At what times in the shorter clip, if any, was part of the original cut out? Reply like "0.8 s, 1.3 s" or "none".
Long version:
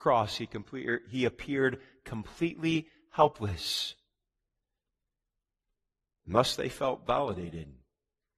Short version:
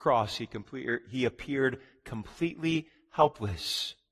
none